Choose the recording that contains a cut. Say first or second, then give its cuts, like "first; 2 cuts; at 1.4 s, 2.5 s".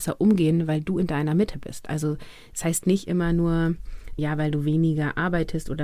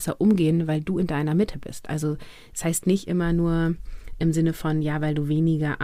first; 1 cut; at 4.2 s